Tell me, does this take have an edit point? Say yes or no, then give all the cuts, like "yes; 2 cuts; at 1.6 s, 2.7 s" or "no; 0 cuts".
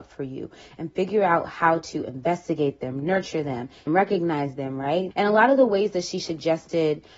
yes; 2 cuts; at 3.9 s, 5.1 s